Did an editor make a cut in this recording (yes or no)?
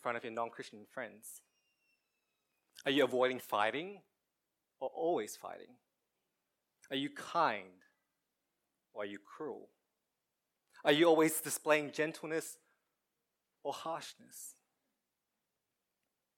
no